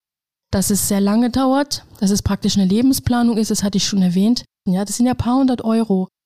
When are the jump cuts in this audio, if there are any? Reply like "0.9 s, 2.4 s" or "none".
4.7 s